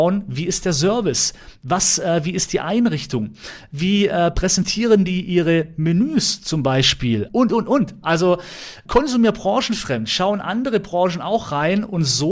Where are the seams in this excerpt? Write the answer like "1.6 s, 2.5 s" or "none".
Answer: 7.3 s, 8.9 s